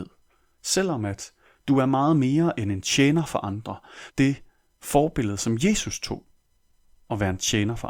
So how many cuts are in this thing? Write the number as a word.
one